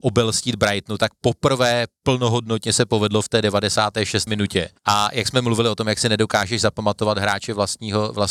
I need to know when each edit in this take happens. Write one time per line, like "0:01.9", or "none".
0:04.3